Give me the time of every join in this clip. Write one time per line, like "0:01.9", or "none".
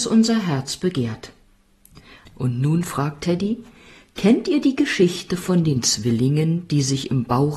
0:02.3